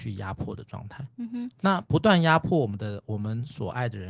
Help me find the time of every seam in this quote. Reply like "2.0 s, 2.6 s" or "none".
none